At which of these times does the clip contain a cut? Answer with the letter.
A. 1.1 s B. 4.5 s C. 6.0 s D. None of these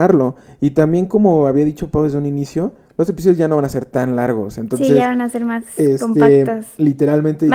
D